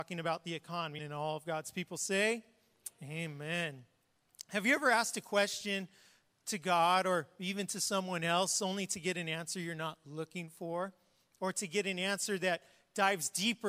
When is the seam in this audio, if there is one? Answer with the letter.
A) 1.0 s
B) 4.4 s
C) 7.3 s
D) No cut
A